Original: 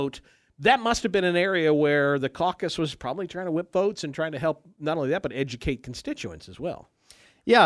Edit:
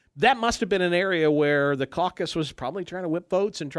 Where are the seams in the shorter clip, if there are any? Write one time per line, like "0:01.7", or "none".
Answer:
none